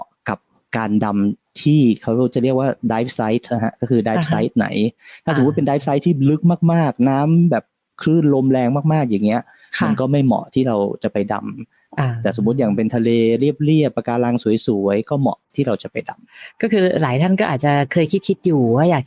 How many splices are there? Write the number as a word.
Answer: one